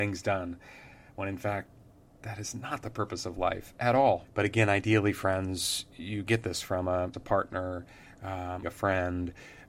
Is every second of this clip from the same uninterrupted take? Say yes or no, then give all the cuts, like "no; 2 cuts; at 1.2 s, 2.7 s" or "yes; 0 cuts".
no; 3 cuts; at 4.2 s, 7.1 s, 8.6 s